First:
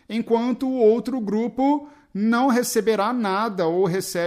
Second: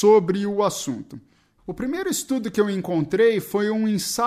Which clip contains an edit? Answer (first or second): second